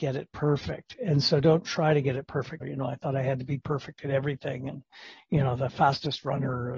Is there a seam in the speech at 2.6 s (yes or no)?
yes